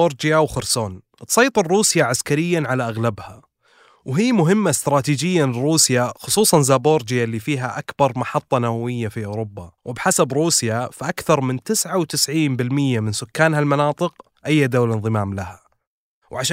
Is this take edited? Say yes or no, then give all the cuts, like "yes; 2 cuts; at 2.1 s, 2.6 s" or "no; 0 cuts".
yes; 1 cut; at 9.8 s